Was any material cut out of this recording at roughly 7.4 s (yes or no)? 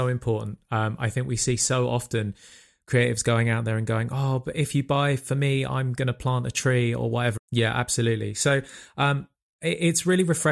yes